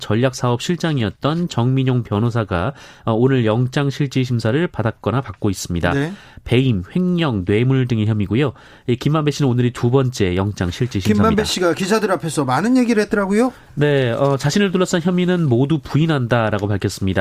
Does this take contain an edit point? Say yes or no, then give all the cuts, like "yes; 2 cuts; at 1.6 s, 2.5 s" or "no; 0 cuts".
no; 0 cuts